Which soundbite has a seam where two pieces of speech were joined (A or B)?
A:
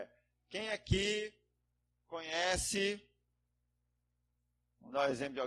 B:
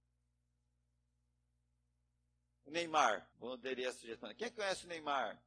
B